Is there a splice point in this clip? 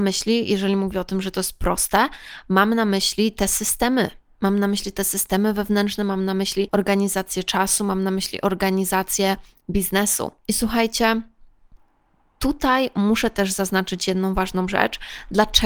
no; 0 cuts

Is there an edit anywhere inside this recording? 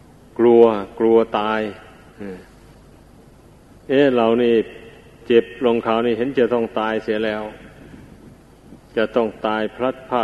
yes; 1 cut; at 8.8 s

